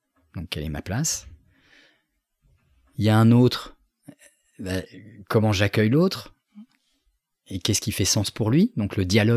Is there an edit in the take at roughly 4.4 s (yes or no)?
no